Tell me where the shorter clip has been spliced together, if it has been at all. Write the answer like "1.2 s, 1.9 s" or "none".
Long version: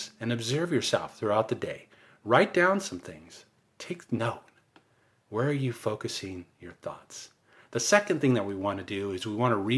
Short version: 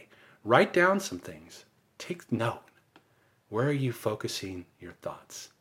none